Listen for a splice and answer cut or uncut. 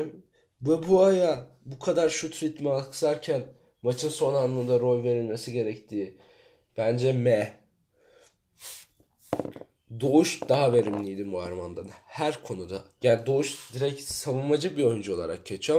cut